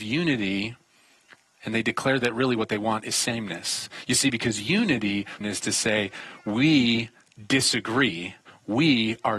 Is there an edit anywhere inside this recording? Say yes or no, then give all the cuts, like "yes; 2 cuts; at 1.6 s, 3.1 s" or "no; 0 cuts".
yes; 1 cut; at 5.4 s